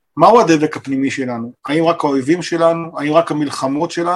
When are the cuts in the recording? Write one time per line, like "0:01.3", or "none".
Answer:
none

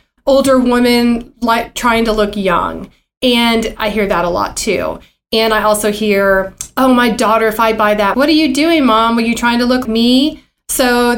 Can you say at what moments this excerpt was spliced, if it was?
0:08.1
0:09.9

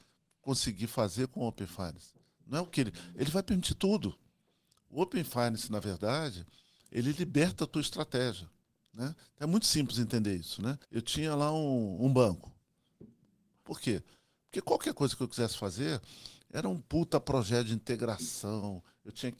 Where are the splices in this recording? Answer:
0:10.8
0:13.6

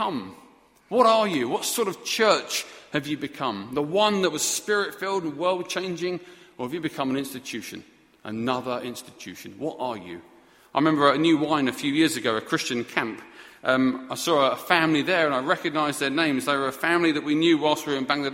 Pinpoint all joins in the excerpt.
none

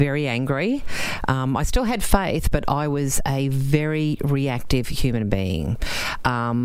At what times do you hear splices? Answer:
none

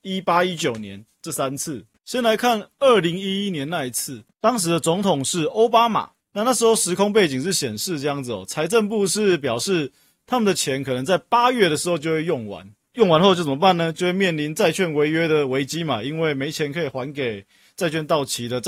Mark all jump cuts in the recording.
none

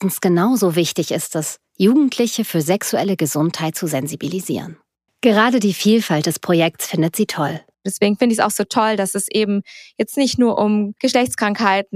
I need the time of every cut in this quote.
0:05.1
0:07.7

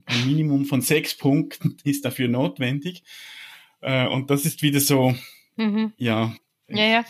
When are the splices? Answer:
none

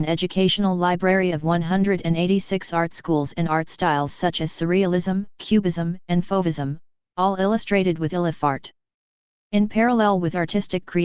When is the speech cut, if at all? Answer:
0:09.3

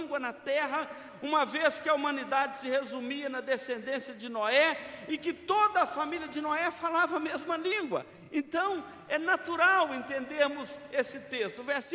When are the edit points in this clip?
none

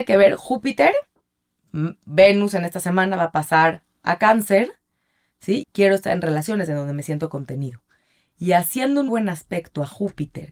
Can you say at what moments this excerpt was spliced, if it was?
0:05.6
0:09.1

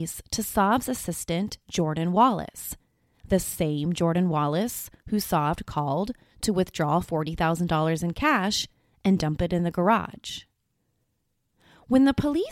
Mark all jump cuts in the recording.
none

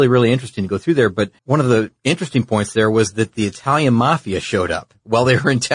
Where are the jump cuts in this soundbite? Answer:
0:01.4

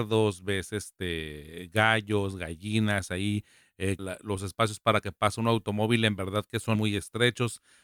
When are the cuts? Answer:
0:04.0
0:06.7

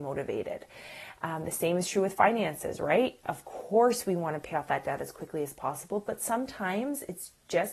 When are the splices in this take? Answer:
none

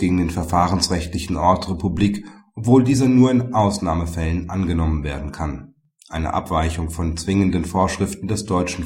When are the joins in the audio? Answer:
none

